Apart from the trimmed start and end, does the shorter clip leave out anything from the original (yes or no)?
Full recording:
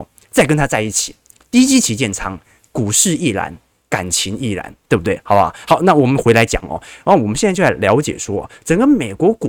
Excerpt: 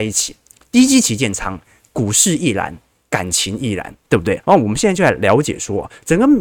yes